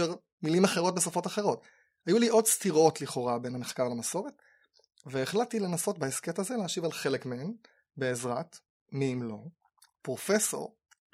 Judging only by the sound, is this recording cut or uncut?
uncut